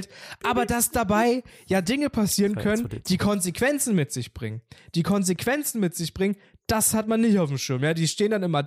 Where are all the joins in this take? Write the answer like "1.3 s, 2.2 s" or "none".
none